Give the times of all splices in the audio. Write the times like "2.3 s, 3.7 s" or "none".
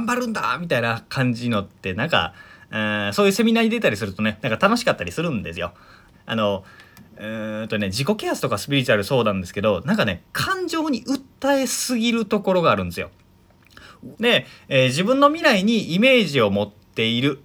4.4 s, 6.1 s, 14.1 s